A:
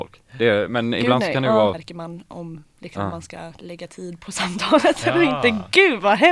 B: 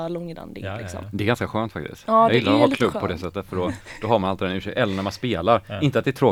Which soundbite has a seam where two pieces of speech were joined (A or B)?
A